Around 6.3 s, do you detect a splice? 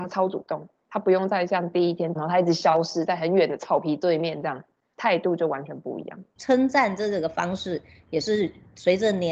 no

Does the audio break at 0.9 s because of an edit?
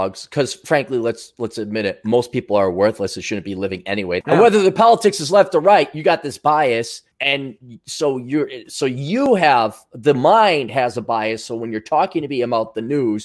no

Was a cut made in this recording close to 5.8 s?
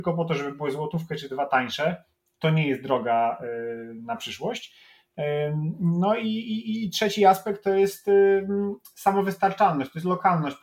no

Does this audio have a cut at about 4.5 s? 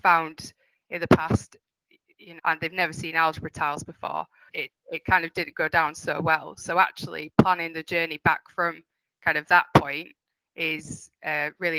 yes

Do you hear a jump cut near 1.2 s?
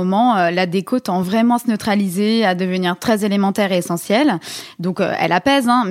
no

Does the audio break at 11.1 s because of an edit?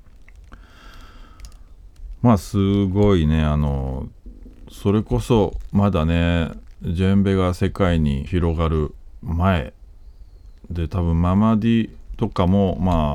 no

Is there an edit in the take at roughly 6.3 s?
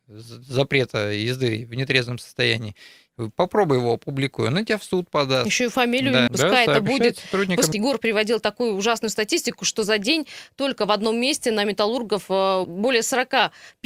yes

